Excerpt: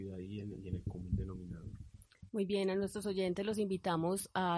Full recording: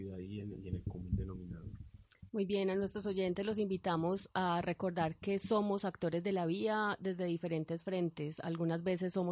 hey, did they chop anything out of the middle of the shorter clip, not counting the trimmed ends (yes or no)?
no